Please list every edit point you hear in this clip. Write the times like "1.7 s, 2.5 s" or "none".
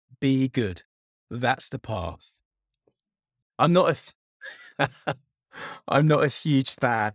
3.4 s